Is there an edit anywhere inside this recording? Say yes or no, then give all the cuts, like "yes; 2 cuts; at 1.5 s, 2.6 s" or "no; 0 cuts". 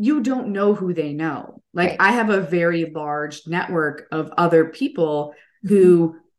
no; 0 cuts